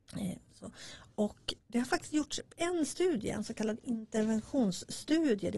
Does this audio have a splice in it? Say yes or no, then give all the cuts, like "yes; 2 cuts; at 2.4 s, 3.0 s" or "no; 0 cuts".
yes; 1 cut; at 1.6 s